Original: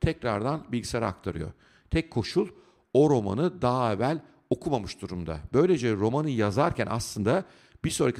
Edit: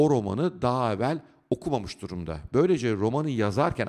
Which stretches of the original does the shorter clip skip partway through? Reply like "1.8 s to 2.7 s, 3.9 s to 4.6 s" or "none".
none